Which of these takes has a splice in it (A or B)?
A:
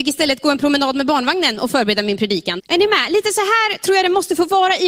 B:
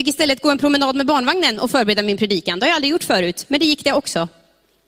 A